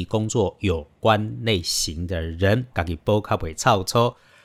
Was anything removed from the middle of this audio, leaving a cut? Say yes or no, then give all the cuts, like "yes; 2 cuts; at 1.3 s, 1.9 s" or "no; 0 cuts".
yes; 1 cut; at 2.7 s